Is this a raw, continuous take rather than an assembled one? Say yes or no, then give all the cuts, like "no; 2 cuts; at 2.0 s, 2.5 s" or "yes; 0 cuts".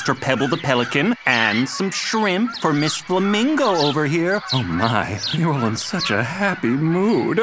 yes; 0 cuts